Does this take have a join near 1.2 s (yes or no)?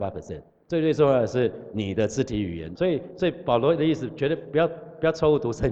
no